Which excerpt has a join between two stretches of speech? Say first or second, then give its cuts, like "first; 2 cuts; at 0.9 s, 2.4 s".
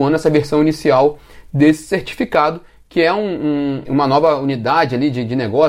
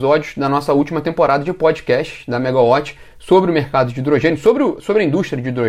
first; 1 cut; at 3.8 s